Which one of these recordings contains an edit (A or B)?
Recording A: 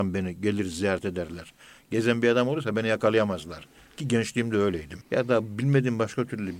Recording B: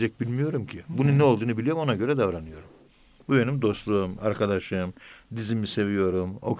A